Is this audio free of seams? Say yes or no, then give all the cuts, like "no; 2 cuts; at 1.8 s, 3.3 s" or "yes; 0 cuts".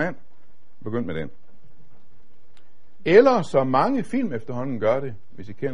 yes; 0 cuts